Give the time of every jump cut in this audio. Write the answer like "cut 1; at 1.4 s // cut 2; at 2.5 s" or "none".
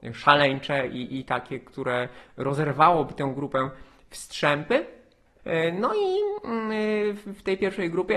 cut 1; at 5.4 s